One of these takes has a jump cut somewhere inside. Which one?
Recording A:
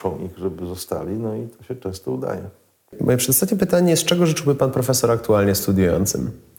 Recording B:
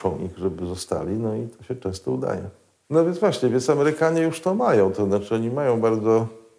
B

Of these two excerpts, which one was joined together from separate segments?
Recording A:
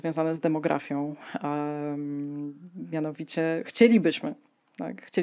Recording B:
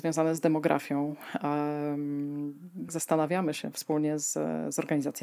B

